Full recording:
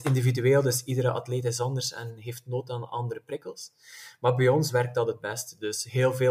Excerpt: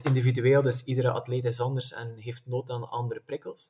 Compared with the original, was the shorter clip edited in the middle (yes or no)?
no